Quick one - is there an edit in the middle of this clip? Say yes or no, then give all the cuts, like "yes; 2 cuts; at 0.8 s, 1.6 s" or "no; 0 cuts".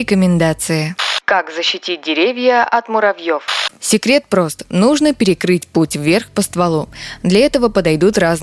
no; 0 cuts